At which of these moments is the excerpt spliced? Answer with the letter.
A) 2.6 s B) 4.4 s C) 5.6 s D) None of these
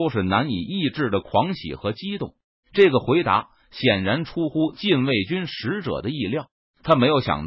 A